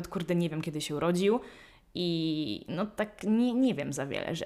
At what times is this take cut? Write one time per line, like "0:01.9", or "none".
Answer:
none